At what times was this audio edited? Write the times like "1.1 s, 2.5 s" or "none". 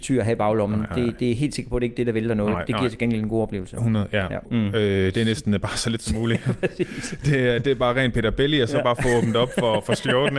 4.4 s

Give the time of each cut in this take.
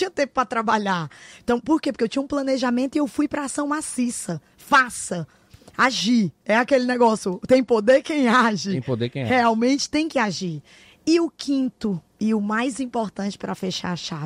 none

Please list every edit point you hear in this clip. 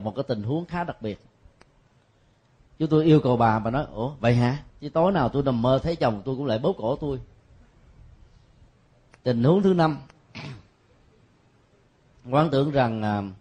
4.7 s

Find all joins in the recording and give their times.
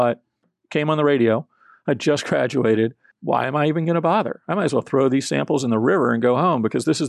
3.1 s

